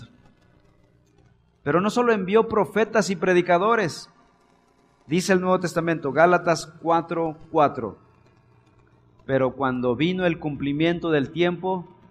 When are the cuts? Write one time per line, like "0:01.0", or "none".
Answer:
none